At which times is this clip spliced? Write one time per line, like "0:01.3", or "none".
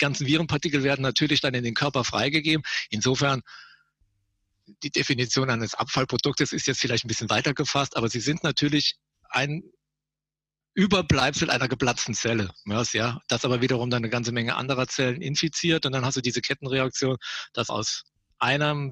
0:12.9
0:17.7